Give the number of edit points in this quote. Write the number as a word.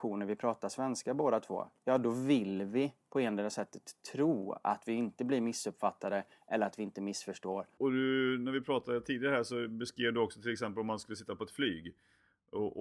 one